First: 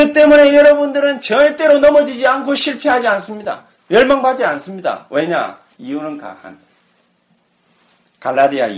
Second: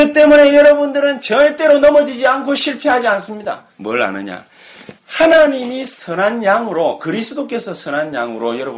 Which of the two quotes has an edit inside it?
second; 2 cuts; at 3.7 s, 5.0 s

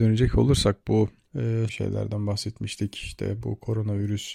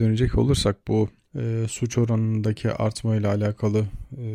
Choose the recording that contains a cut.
first; 1 cut; at 1.7 s

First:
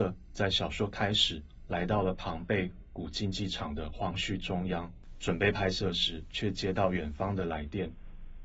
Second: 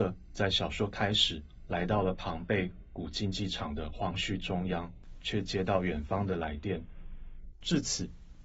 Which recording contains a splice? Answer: second; 2 cuts; at 5.2 s, 7.5 s

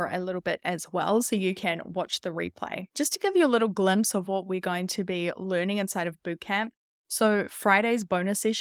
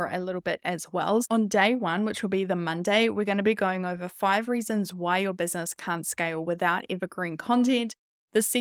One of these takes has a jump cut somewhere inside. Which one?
second; 1 cut; at 1.2 s

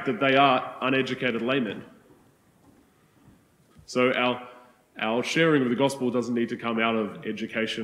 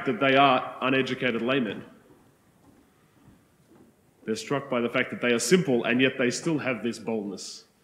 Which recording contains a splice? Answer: first; 1 cut; at 3.7 s

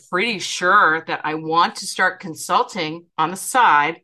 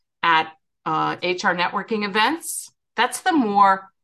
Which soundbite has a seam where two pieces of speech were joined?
second; 2 cuts; at 1.2 s, 2.9 s

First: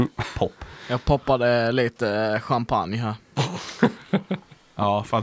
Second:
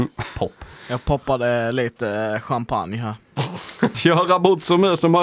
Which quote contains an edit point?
second; 1 cut; at 3.9 s

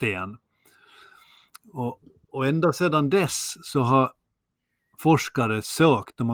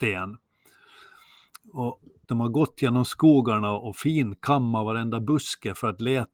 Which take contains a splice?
second; 1 cut; at 2.3 s

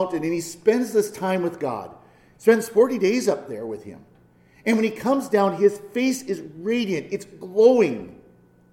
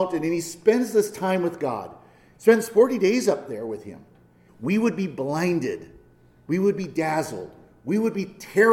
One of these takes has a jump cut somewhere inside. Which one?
second; 1 cut; at 4.5 s

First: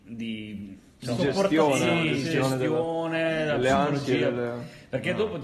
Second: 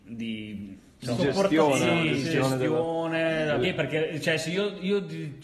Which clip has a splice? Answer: second; 1 cut; at 3.6 s

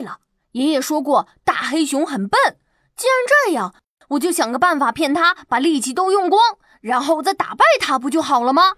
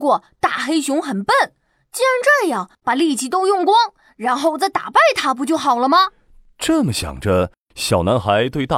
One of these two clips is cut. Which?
second; 1 cut; at 2.8 s

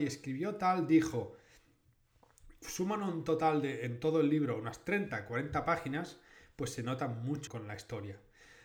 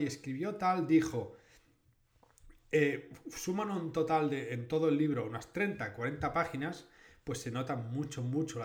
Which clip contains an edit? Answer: first; 2 cuts; at 2.6 s, 7.5 s

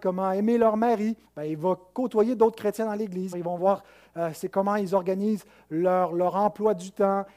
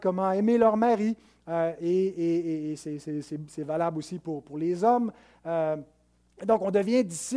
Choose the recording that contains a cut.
first; 2 cuts; at 1.3 s, 3.3 s

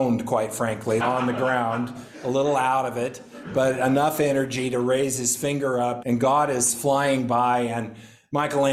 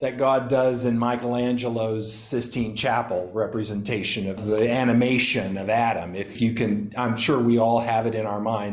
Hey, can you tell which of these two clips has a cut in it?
first; 2 cuts; at 1.0 s, 6.0 s

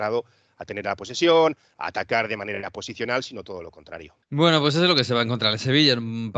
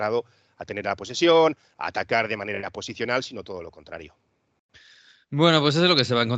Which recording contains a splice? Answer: first; 1 cut; at 4.2 s

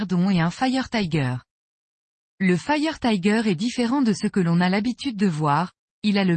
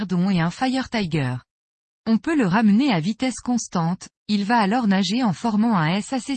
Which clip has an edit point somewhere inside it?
second; 2 cuts; at 1.9 s, 4.1 s

